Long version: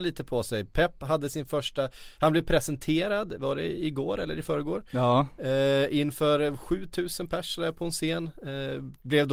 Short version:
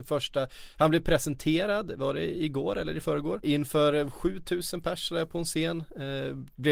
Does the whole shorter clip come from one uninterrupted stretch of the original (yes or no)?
no